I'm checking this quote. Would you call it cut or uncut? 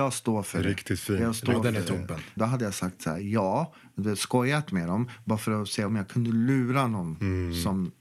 cut